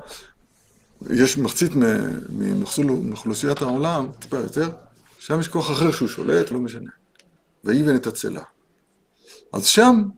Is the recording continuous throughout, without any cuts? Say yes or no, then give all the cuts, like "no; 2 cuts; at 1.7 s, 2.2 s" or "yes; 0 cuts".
no; 2 cuts; at 5.2 s, 6.5 s